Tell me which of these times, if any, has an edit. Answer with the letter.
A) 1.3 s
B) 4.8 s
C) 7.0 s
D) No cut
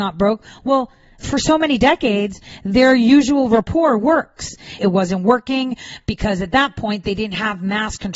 B